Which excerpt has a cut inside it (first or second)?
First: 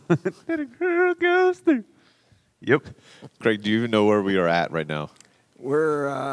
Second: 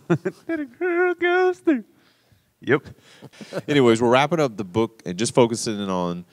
second